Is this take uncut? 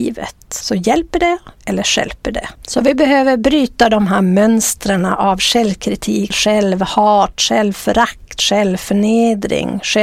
no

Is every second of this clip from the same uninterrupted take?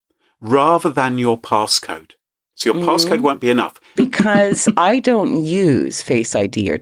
no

